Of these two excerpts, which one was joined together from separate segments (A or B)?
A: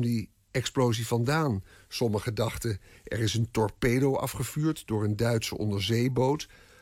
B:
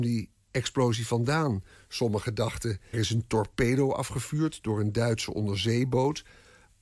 B